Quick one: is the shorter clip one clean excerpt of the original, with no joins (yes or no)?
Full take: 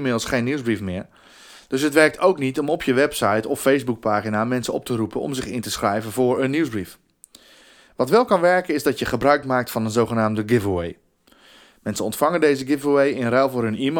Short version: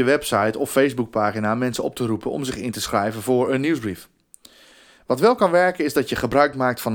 yes